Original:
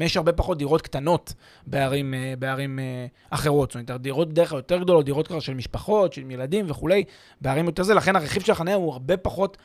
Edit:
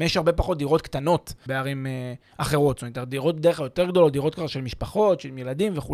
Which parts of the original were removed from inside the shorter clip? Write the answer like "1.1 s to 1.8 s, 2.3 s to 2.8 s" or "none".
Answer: 1.5 s to 2.4 s